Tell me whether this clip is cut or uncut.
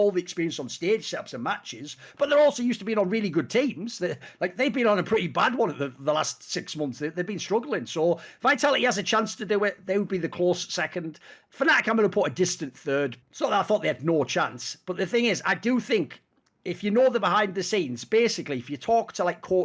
cut